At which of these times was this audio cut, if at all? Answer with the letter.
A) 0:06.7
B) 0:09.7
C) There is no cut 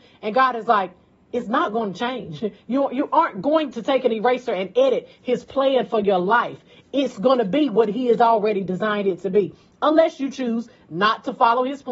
C